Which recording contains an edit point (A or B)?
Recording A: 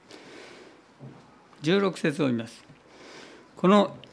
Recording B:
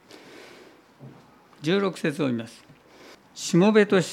B